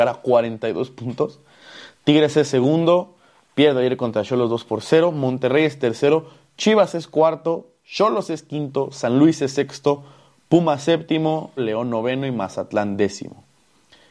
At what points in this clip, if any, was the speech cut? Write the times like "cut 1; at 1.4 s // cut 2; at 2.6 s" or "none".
cut 1; at 11.6 s